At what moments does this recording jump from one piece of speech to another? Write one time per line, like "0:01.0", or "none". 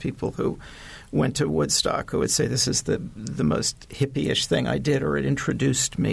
none